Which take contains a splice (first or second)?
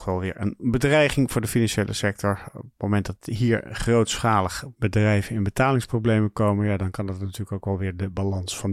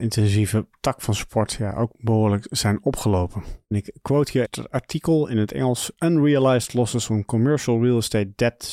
second